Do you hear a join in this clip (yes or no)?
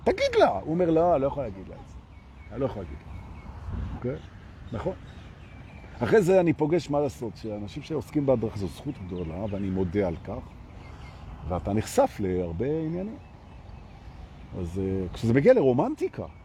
yes